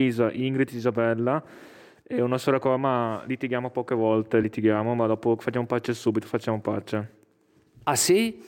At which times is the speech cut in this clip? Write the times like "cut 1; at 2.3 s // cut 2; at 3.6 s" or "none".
none